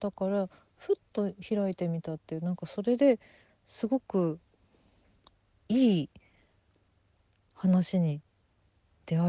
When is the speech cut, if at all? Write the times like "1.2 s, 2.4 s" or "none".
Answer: none